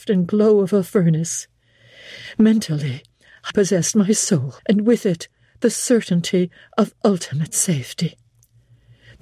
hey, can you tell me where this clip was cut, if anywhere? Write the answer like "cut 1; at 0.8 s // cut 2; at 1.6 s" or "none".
cut 1; at 3.5 s // cut 2; at 4.6 s

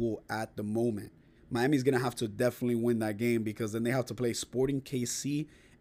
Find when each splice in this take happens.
cut 1; at 1.4 s

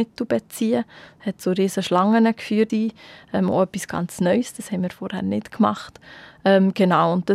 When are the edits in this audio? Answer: cut 1; at 2.7 s

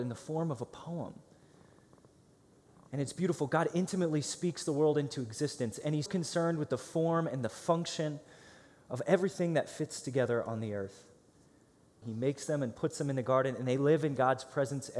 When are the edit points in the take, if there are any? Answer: cut 1; at 6.1 s // cut 2; at 12.0 s

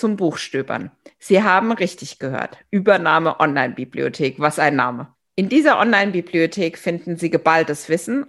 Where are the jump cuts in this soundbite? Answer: cut 1; at 5.2 s

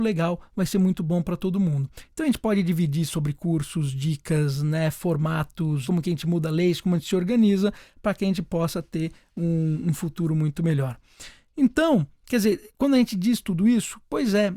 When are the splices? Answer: cut 1; at 5.9 s

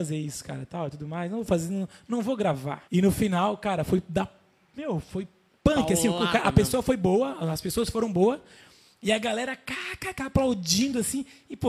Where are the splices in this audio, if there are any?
cut 1; at 2.9 s

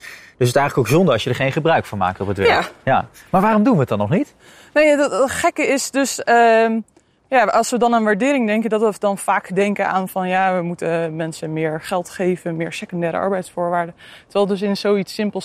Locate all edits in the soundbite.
none

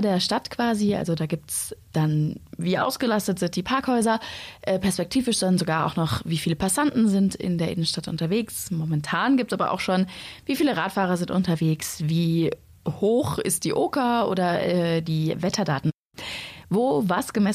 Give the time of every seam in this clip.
none

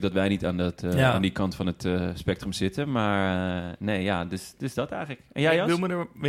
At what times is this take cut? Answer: none

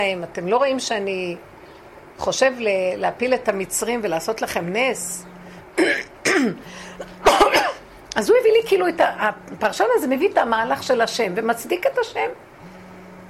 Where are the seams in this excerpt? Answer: none

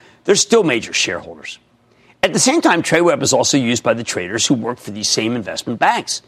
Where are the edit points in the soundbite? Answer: none

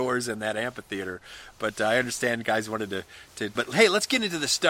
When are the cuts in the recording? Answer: cut 1; at 3.6 s

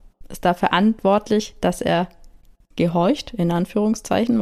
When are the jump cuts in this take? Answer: none

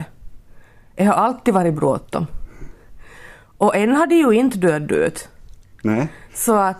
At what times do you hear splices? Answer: none

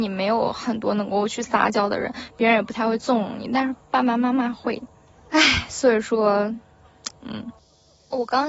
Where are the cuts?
cut 1; at 5.2 s // cut 2; at 7.1 s

